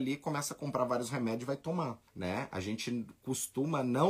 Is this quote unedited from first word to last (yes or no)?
no